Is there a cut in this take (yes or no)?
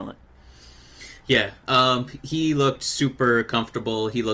no